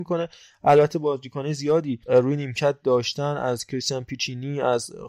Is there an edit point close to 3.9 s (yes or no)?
no